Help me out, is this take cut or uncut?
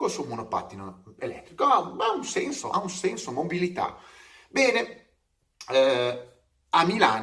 uncut